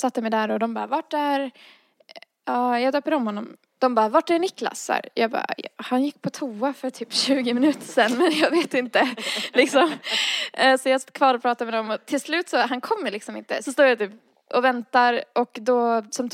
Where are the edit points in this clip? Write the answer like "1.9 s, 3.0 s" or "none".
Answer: 3.7 s, 13.6 s

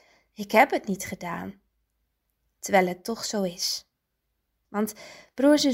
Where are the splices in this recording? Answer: 4.7 s

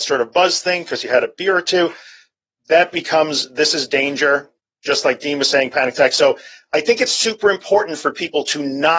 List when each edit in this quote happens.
none

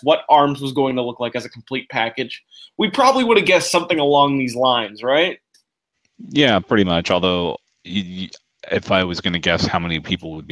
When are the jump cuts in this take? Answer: none

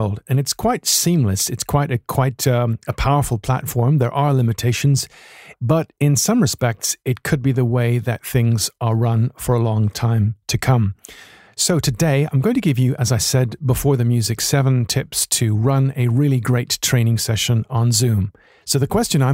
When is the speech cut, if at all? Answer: 5.5 s

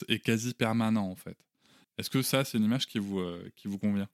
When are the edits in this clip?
1.8 s

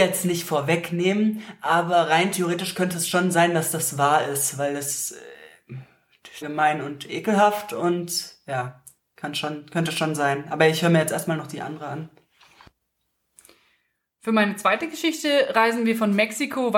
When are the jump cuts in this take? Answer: 6.4 s

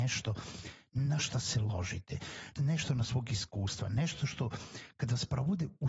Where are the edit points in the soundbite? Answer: 2.6 s

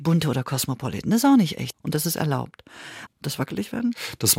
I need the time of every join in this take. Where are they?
1.7 s, 3.1 s

